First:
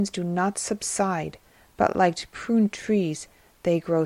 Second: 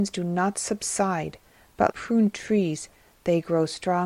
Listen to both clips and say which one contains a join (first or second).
second